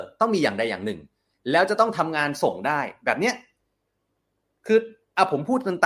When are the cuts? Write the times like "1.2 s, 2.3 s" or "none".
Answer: none